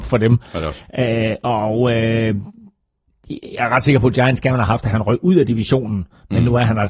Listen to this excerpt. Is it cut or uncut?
uncut